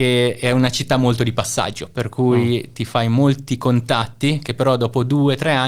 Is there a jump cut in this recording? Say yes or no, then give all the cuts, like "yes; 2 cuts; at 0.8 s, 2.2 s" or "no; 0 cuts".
no; 0 cuts